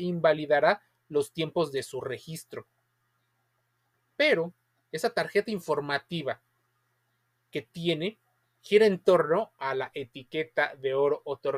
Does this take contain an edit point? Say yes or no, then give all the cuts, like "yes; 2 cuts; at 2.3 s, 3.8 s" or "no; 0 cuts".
no; 0 cuts